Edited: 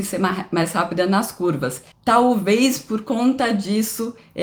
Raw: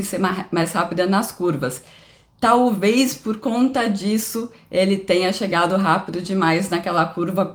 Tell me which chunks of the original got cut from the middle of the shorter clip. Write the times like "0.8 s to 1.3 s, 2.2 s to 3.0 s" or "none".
1.9 s to 2.3 s